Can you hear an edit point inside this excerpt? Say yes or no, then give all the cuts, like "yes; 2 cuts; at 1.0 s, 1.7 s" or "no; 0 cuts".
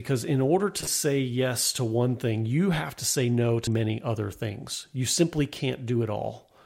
yes; 1 cut; at 3.7 s